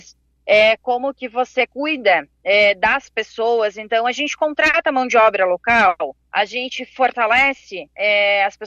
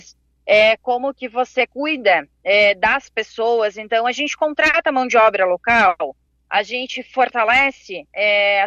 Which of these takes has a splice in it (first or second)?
first